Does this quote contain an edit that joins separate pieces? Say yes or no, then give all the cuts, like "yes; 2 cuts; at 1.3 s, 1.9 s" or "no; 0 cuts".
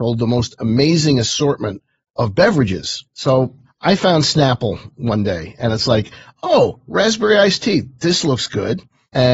no; 0 cuts